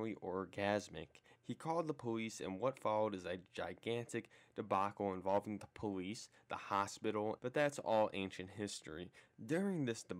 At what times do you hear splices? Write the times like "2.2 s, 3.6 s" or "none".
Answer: 1.4 s, 7.4 s